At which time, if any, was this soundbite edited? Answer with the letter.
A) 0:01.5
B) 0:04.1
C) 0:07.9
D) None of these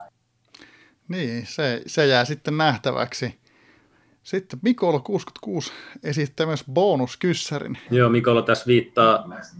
C